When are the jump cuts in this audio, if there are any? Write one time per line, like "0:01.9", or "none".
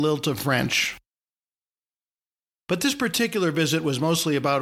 none